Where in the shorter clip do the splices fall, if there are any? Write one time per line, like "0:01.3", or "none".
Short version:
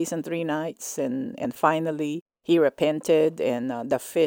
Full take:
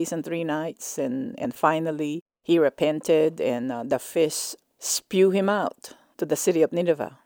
none